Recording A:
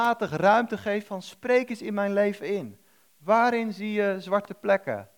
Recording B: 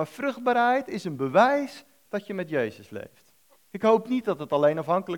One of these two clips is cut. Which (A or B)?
B